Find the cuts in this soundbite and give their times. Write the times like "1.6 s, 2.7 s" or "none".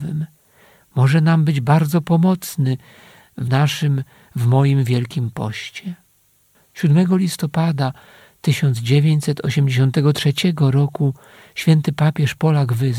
none